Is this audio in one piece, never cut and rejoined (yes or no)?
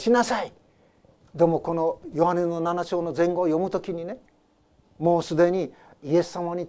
no